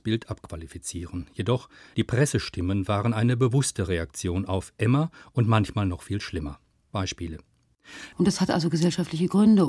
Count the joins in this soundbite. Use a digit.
1